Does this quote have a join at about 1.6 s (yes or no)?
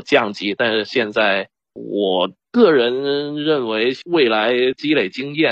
yes